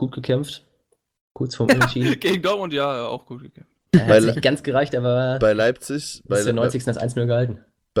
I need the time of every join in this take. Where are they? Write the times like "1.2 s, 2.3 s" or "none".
none